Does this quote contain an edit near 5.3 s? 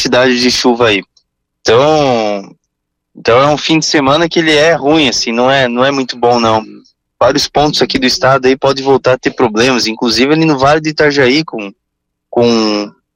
no; 1 cut; at 1.5 s

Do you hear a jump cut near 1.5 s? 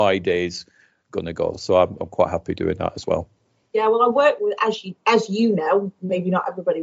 no; 0 cuts

